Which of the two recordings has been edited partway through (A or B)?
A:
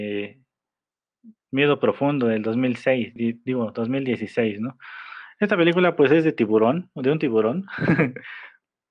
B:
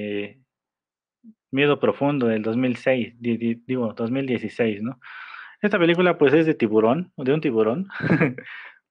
A